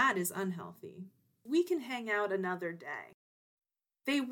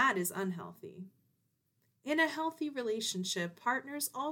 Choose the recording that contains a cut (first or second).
first